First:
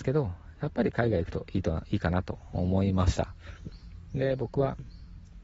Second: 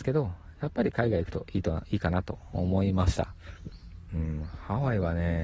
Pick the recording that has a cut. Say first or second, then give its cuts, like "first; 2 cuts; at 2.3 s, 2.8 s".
second; 1 cut; at 4.1 s